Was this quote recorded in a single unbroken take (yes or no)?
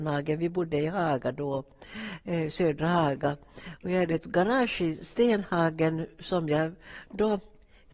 yes